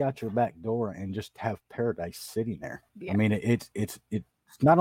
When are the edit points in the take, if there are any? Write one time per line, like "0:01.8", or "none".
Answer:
0:02.9